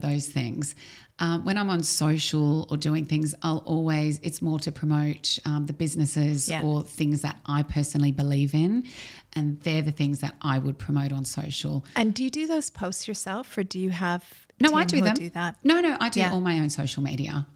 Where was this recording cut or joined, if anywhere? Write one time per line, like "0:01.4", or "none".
none